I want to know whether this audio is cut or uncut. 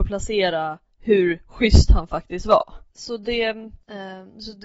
cut